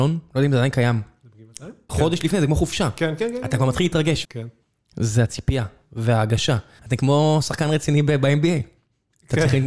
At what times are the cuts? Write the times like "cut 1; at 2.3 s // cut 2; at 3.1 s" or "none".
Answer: cut 1; at 1.9 s // cut 2; at 4.2 s // cut 3; at 6.8 s